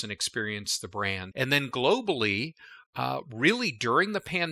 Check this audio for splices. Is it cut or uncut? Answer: cut